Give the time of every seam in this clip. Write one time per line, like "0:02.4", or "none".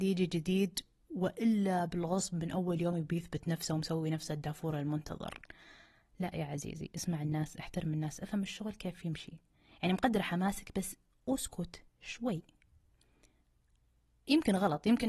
none